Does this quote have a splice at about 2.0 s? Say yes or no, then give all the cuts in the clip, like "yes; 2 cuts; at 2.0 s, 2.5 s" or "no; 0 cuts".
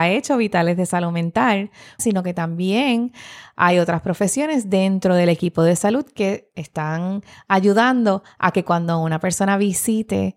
yes; 1 cut; at 2.0 s